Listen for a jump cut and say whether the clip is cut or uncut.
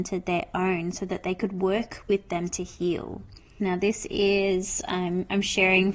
cut